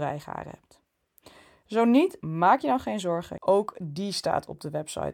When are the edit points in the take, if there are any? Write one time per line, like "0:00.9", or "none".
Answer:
0:02.2
0:03.4

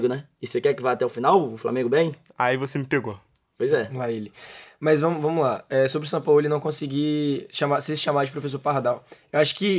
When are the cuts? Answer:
none

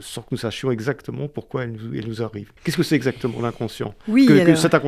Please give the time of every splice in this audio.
0:02.6

